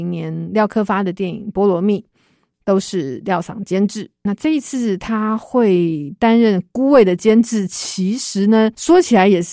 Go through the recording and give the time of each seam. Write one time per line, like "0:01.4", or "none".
none